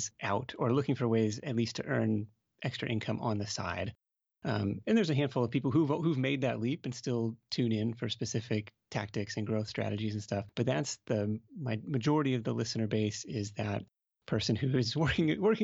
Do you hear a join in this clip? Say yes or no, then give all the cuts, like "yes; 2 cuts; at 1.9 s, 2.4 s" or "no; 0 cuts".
no; 0 cuts